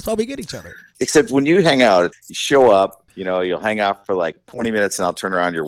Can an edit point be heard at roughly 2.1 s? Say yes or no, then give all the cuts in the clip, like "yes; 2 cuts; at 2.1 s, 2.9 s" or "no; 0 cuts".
yes; 1 cut; at 2.1 s